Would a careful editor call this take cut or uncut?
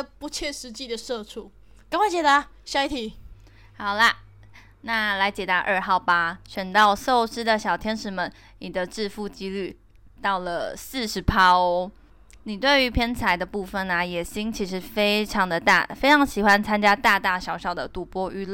uncut